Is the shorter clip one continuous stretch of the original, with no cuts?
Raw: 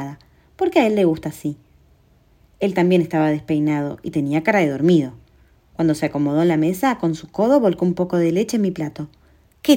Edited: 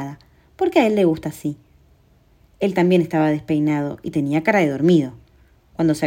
yes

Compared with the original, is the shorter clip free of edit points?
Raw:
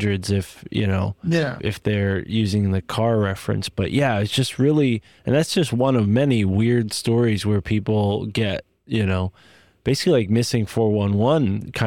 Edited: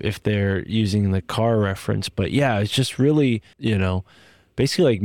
no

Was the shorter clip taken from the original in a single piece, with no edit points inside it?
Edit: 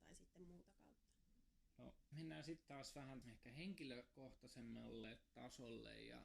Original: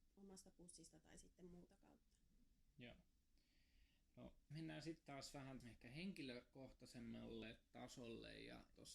no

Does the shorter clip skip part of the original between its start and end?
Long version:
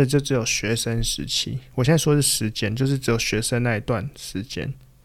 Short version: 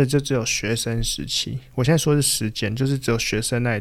no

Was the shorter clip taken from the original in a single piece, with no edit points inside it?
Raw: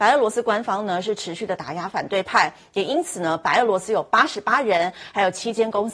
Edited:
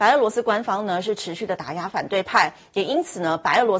yes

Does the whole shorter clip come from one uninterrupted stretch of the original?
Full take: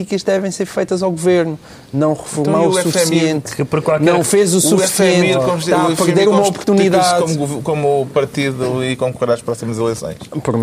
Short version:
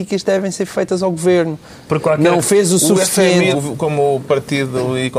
no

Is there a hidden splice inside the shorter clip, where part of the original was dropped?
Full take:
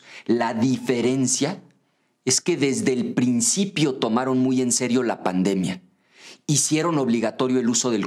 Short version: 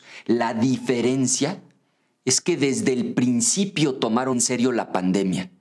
yes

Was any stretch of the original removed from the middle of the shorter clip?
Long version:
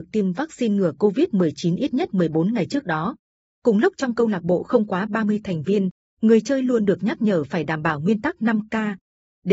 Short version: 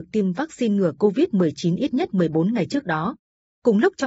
no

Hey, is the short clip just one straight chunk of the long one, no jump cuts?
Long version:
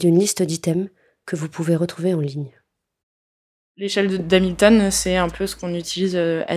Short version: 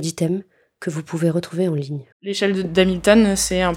no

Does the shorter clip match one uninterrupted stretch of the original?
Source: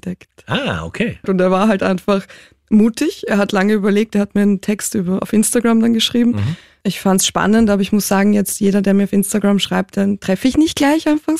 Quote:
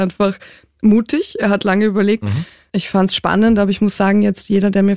no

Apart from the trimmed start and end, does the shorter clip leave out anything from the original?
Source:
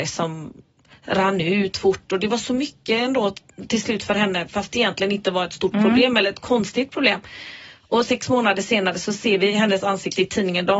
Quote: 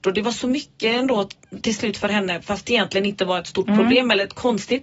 no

